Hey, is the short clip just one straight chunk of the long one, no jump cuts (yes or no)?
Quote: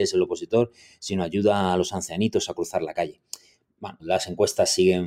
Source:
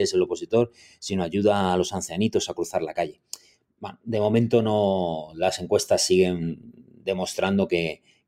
no